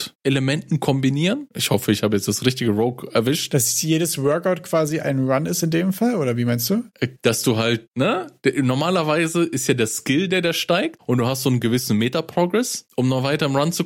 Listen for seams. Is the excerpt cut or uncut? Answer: cut